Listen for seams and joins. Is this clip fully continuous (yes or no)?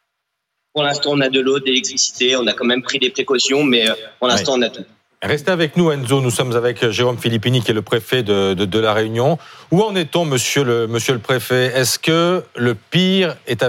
yes